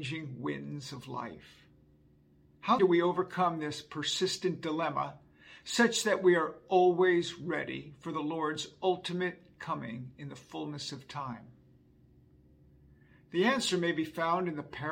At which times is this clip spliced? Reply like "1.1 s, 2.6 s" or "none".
2.8 s